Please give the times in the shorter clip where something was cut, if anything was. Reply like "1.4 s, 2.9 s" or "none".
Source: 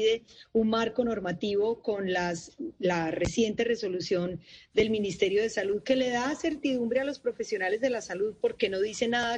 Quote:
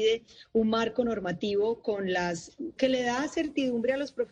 2.8 s